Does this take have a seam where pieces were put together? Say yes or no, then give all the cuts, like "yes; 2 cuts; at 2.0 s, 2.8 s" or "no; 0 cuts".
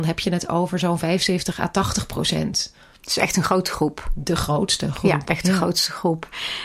no; 0 cuts